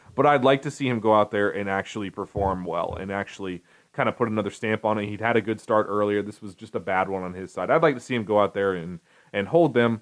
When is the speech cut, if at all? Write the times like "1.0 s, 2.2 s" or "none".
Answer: none